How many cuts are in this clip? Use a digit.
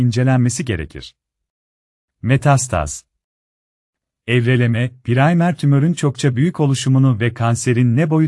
1